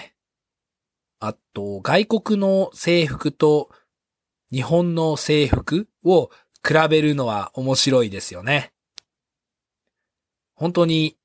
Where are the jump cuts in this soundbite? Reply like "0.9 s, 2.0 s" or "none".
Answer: 1.0 s